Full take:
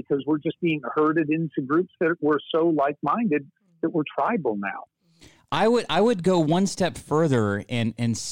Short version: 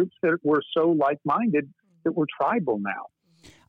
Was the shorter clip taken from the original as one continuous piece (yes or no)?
yes